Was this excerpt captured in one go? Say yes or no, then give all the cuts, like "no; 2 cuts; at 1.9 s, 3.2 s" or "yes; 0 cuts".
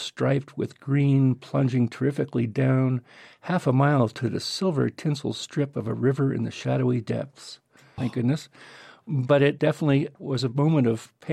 no; 1 cut; at 8.0 s